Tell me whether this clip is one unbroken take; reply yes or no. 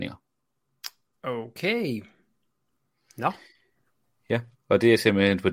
yes